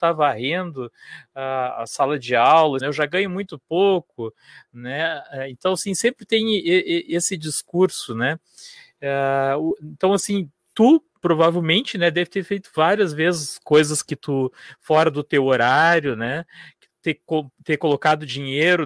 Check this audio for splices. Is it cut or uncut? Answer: cut